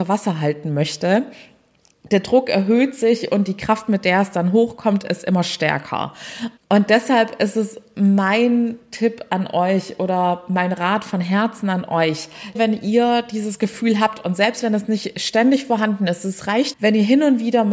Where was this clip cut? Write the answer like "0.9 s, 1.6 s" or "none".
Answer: 6.6 s, 12.5 s, 16.7 s

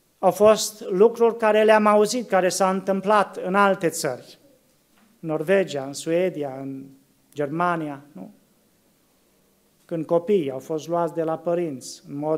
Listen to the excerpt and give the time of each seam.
none

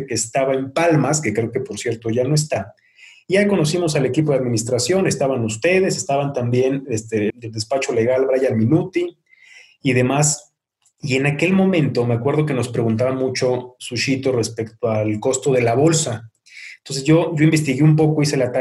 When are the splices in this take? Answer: 7.3 s

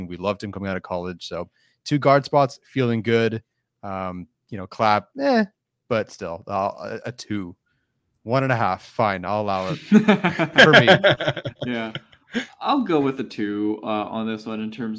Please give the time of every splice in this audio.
none

